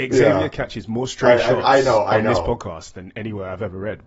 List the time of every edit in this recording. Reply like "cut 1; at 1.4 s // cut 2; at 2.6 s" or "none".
none